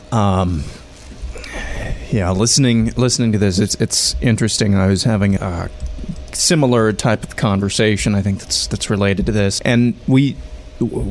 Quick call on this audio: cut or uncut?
cut